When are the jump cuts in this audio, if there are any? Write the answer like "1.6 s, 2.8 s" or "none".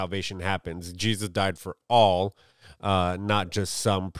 none

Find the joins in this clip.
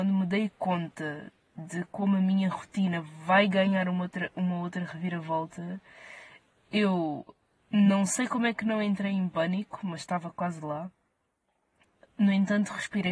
none

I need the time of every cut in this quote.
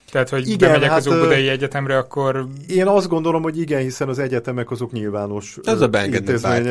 none

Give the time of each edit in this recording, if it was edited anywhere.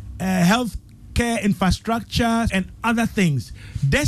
2.5 s

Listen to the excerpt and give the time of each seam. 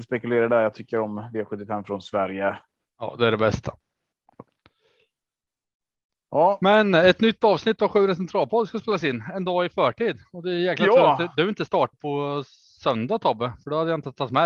11.9 s

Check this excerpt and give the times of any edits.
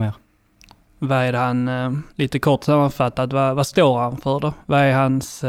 none

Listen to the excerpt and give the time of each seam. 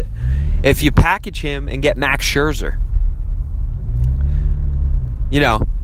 none

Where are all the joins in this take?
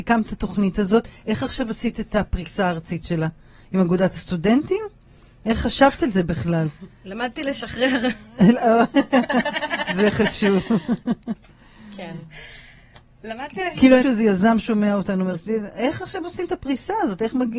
14.0 s, 15.3 s

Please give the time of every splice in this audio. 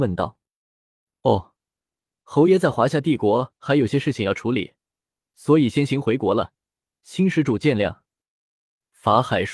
none

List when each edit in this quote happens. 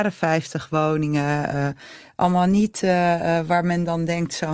none

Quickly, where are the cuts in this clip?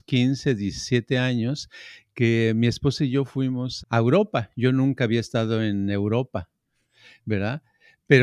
3.8 s

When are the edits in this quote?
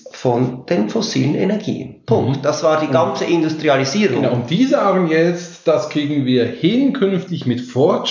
none

